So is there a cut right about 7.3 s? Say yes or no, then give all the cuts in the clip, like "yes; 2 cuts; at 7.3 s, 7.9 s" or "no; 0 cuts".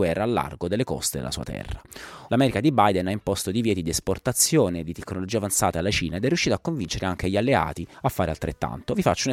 no; 1 cut; at 2.3 s